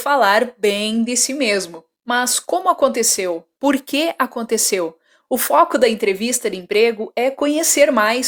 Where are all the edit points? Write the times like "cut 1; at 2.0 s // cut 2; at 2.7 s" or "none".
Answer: cut 1; at 2.0 s // cut 2; at 5.2 s